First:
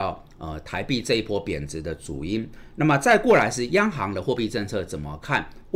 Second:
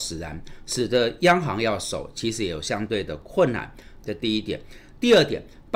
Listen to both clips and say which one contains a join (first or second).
second